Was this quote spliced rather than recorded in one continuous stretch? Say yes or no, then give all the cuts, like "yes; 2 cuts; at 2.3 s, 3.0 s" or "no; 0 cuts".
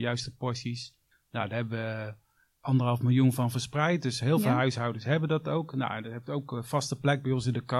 no; 0 cuts